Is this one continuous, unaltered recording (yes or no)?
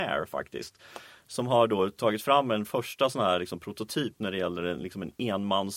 yes